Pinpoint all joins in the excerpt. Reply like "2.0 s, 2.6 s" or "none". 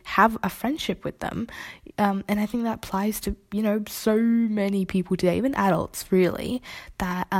none